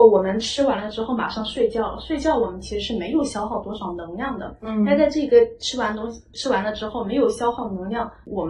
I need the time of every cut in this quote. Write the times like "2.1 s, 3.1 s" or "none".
6.3 s